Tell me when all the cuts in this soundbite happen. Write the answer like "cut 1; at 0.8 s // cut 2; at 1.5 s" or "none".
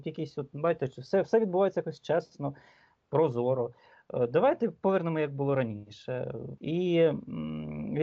cut 1; at 6.6 s